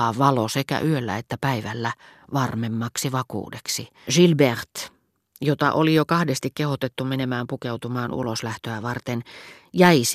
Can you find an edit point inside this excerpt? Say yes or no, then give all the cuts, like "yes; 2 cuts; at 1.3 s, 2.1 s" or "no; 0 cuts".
yes; 1 cut; at 4.1 s